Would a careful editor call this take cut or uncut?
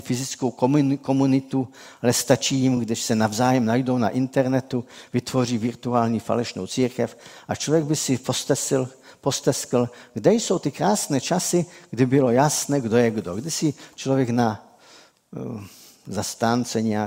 uncut